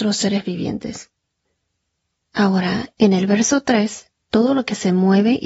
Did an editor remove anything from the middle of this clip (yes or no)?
yes